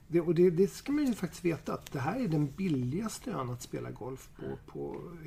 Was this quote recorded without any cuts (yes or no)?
yes